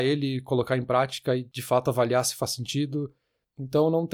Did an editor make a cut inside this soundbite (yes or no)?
no